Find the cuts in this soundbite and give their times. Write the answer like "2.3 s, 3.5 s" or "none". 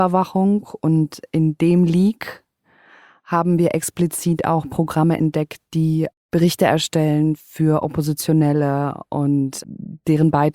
9.6 s